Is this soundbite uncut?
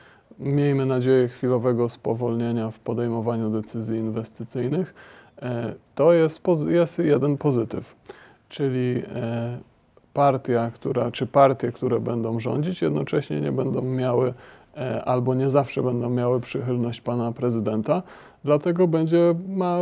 yes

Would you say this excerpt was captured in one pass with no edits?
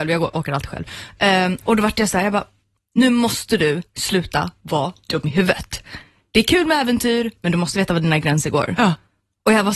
yes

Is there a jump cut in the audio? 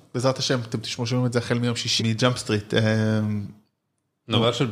yes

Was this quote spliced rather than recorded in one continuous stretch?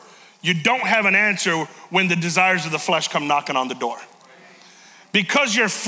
no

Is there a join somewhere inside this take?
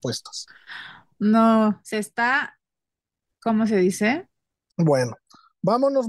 yes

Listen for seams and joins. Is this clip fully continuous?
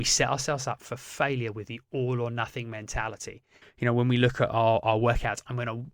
no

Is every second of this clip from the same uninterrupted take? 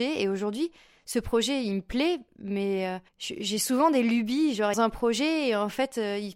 no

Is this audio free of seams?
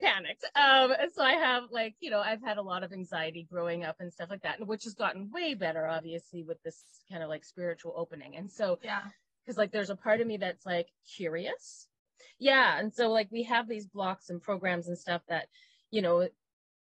no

